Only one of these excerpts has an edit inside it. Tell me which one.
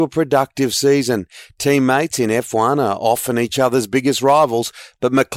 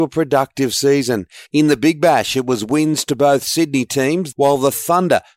second; 2 cuts; at 1.5 s, 4.3 s

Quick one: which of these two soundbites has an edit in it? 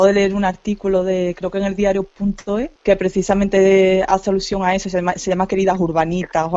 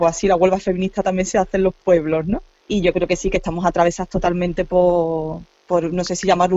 first; 1 cut; at 2.8 s

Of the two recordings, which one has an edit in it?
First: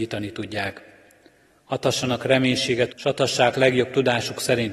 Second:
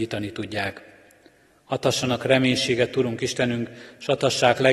first; 1 cut; at 2.9 s

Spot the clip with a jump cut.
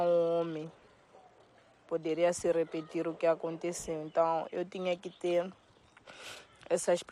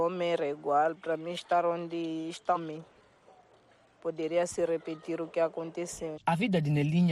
second; 2 cuts; at 2.6 s, 6.2 s

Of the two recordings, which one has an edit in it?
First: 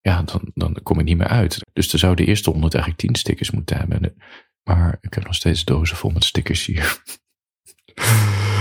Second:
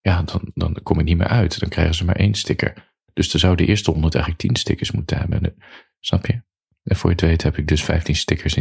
first; 2 cuts; at 1.6 s, 4.6 s

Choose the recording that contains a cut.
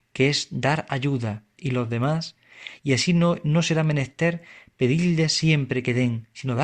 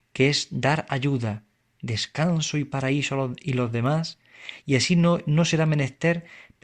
first; 1 cut; at 1.6 s

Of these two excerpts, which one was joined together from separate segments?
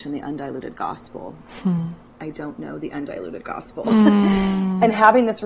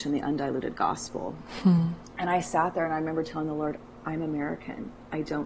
first; 1 cut; at 2.1 s

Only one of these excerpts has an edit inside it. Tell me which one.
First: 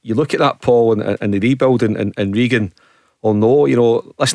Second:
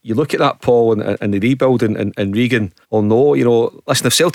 second; 1 cut; at 2.8 s

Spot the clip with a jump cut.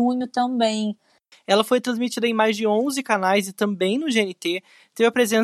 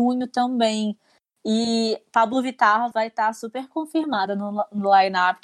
first; 1 cut; at 1.3 s

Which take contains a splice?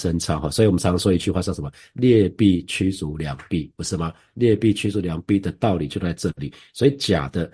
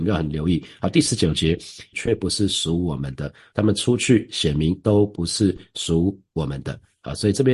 second; 2 cuts; at 1.9 s, 3.5 s

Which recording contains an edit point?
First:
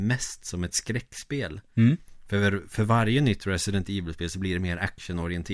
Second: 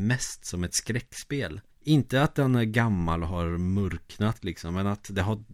second; 1 cut; at 1.7 s

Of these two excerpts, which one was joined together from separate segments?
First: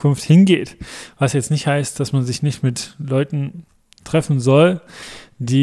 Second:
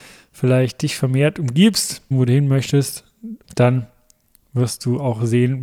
second; 2 cuts; at 2.1 s, 3.4 s

